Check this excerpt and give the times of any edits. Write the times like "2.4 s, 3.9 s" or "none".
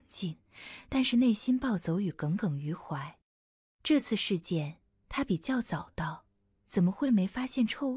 none

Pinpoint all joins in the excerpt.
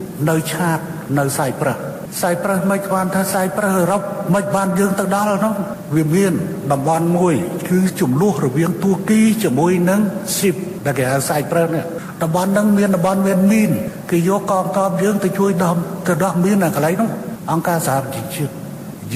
none

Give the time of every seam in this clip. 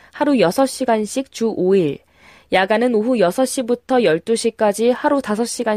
none

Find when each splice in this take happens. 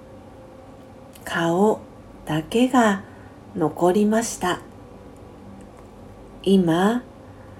none

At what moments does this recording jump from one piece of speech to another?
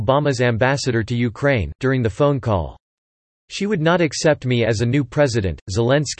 1.8 s

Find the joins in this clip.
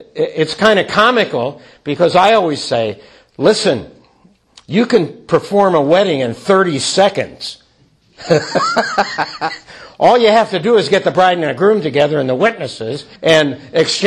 13.2 s

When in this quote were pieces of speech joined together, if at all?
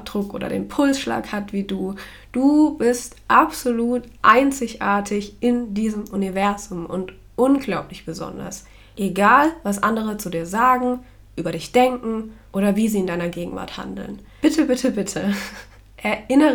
none

